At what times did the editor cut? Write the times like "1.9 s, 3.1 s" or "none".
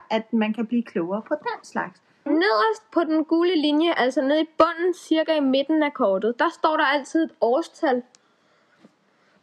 2.3 s